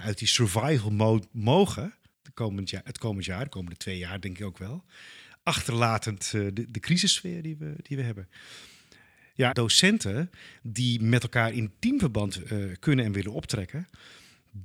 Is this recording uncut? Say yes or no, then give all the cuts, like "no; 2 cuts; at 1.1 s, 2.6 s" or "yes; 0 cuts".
no; 1 cut; at 9.5 s